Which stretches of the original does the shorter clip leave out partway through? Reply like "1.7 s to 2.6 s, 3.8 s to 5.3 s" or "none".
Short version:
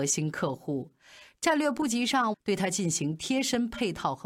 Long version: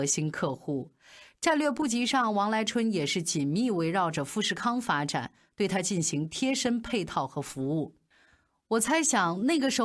2.3 s to 5.4 s